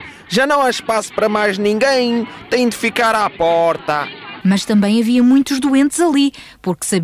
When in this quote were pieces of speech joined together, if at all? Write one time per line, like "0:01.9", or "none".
0:04.4